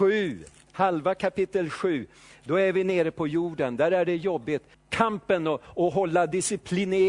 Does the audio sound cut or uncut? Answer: cut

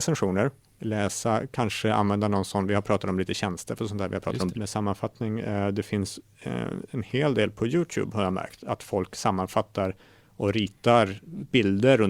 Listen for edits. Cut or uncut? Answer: cut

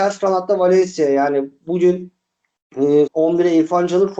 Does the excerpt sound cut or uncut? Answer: cut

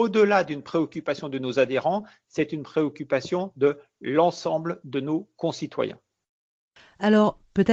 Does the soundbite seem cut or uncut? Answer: uncut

